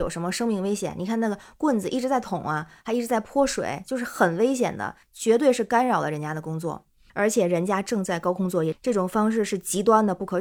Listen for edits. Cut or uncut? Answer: cut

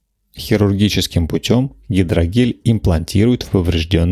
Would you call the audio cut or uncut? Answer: uncut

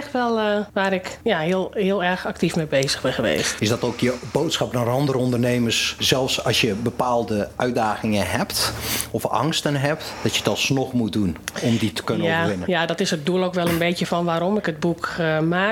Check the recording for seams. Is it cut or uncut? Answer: uncut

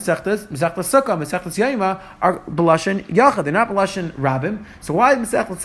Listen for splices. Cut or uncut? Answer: uncut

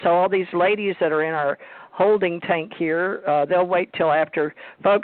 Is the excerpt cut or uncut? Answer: uncut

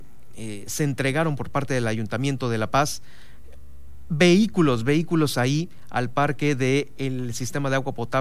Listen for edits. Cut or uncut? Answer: uncut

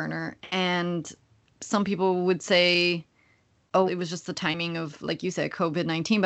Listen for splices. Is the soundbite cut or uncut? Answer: cut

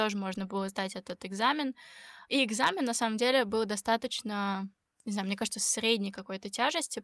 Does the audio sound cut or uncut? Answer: cut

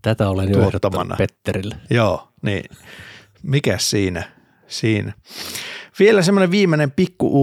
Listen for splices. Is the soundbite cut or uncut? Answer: uncut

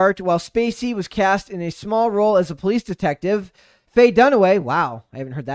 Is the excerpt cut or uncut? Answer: uncut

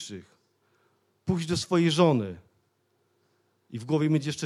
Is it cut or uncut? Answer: uncut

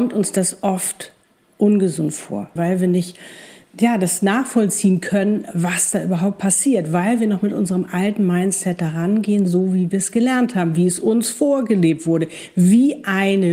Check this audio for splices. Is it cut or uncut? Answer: cut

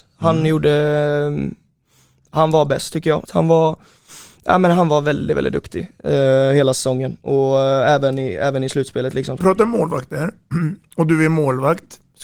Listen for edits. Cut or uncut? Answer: cut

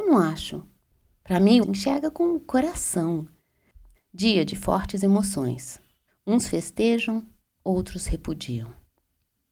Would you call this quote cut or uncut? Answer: cut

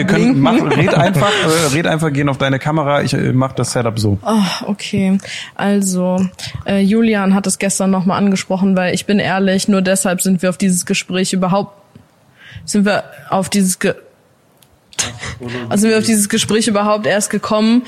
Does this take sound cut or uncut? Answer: uncut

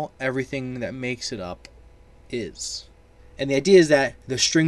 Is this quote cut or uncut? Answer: cut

